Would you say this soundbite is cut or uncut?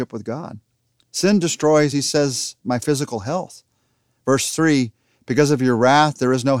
uncut